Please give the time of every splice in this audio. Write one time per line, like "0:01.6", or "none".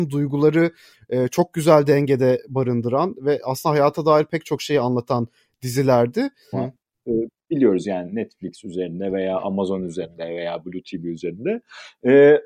0:06.5